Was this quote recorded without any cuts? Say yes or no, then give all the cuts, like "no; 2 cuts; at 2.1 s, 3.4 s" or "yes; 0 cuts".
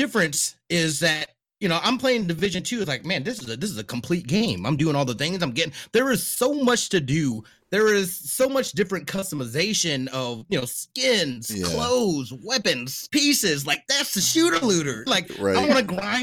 no; 2 cuts; at 13.1 s, 15.1 s